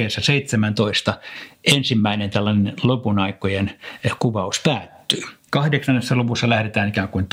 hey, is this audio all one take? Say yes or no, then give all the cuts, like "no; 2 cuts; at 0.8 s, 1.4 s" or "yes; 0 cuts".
no; 1 cut; at 5.5 s